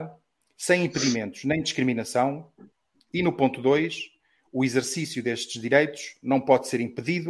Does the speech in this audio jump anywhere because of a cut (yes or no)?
no